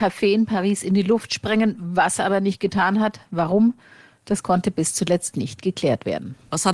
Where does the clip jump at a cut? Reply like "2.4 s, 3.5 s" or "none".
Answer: none